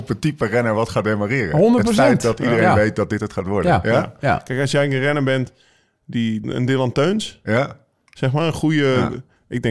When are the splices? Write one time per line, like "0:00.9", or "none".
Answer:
0:06.4